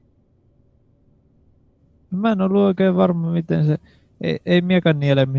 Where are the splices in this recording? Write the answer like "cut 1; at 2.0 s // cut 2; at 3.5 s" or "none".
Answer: none